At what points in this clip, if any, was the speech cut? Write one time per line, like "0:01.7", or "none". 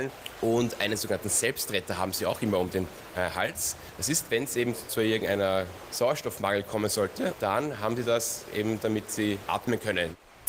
none

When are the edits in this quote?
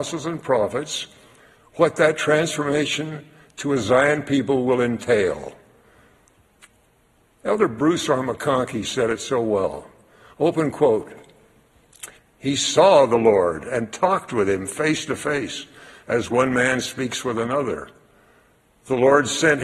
0:12.2

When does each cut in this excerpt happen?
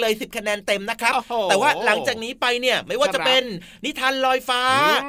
none

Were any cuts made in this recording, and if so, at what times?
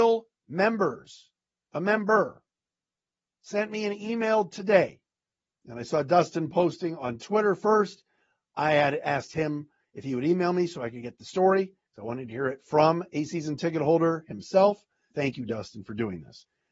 0:15.1

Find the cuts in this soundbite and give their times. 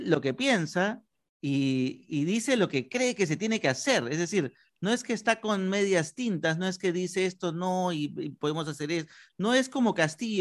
none

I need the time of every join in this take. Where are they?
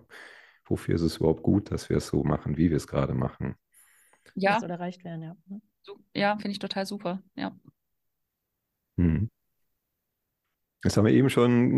none

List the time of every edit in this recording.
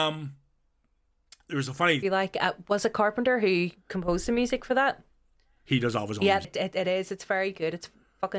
0:02.0
0:06.4

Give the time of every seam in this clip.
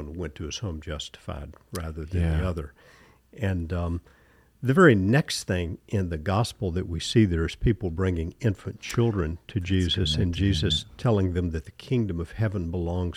none

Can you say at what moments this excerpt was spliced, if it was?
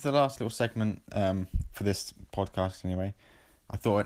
0:01.0

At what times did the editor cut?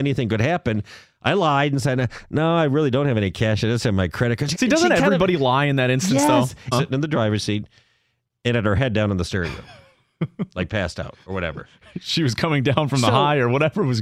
0:04.5
0:06.7

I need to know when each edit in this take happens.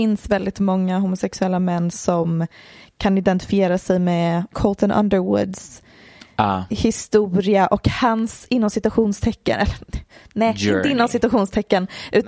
0:04.5

